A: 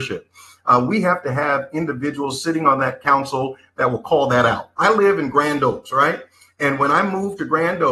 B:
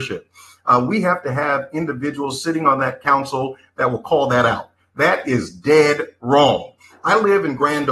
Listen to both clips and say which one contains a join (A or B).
A